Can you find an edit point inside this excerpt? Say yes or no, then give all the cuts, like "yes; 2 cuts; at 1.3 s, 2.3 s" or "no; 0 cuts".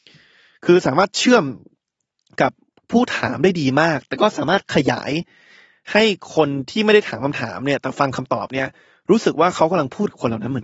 no; 0 cuts